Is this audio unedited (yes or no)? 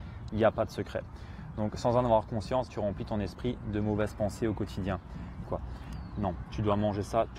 no